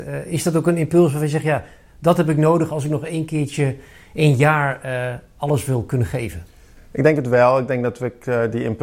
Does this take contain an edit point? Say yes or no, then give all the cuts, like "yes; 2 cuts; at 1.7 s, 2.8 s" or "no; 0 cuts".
no; 0 cuts